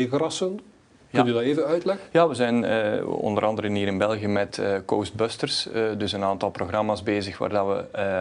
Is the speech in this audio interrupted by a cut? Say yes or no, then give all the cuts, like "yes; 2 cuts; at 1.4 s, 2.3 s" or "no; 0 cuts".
no; 0 cuts